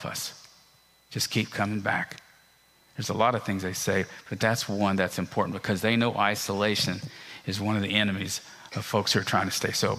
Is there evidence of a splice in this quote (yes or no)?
yes